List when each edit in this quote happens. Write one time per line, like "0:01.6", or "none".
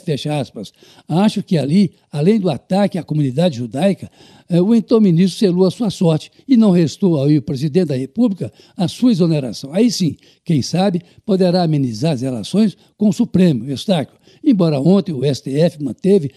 none